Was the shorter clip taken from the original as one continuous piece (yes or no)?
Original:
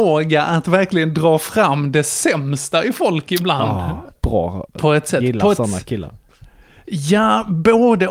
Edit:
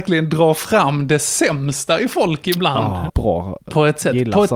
no